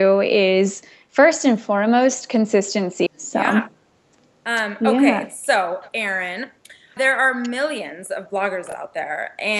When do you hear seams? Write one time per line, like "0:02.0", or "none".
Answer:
0:03.1
0:07.0